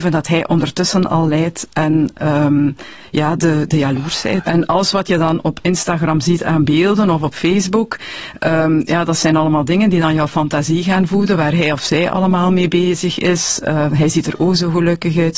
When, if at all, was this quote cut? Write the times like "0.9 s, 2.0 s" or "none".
4.4 s